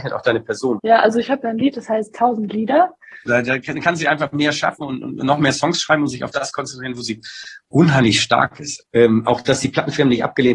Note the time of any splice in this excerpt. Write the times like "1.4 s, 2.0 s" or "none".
3.3 s, 8.8 s